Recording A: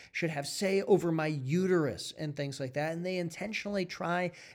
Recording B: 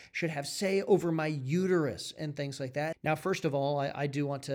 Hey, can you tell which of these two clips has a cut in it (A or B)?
B